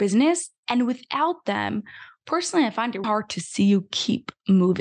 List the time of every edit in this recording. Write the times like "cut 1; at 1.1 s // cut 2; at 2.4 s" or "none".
cut 1; at 3.0 s